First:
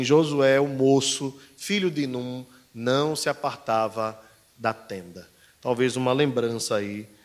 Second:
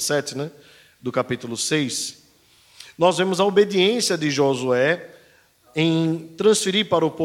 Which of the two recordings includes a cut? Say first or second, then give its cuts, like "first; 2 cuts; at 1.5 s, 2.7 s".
second; 1 cut; at 5.7 s